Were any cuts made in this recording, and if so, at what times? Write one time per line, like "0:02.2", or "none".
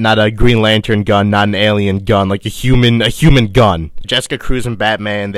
0:04.0